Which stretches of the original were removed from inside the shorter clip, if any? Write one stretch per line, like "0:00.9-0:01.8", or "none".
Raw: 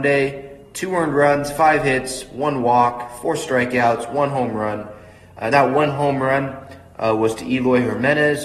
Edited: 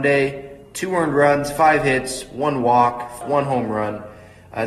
0:03.2-0:04.1